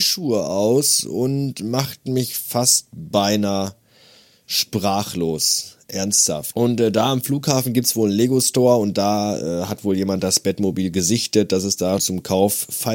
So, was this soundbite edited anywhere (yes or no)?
yes